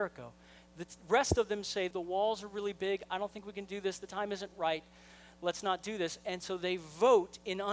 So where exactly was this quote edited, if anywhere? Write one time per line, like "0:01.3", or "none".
0:01.9